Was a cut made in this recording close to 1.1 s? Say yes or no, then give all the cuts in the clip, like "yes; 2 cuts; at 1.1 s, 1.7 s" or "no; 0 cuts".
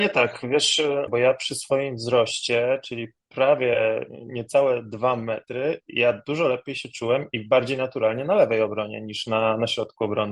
yes; 1 cut; at 1.1 s